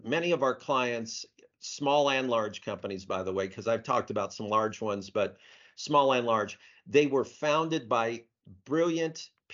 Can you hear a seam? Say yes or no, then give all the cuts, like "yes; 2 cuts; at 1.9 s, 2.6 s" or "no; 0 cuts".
no; 0 cuts